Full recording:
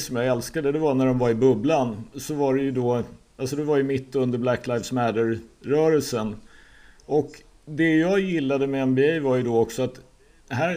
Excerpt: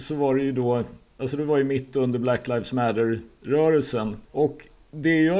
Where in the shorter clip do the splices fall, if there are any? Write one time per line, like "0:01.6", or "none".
0:04.3

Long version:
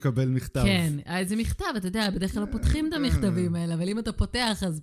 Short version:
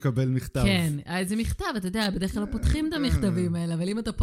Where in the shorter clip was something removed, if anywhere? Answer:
none

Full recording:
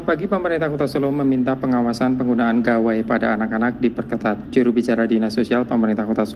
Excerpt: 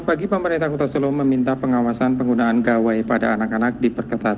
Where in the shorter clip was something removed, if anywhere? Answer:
none

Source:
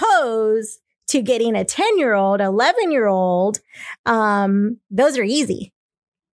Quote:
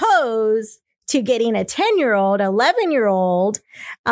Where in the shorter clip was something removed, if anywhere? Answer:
none

